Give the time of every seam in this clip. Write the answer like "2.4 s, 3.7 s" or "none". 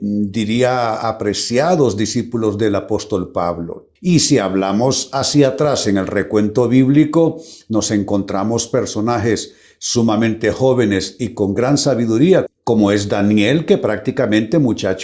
4.0 s, 12.5 s